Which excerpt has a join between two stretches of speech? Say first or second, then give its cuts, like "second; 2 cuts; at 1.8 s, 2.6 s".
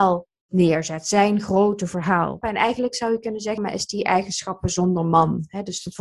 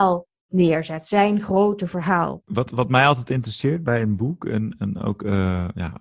first; 2 cuts; at 2.4 s, 3.6 s